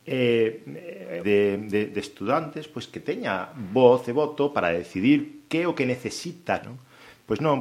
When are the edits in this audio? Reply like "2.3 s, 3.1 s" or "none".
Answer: 1.2 s, 6.6 s